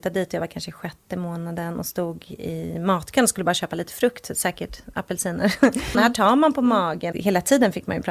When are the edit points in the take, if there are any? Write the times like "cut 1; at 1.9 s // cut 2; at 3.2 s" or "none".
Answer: cut 1; at 4.9 s // cut 2; at 5.9 s // cut 3; at 7.1 s